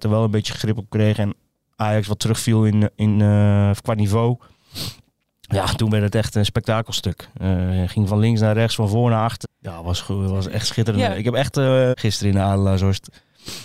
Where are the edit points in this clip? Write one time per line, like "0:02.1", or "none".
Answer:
0:08.1
0:09.4
0:11.9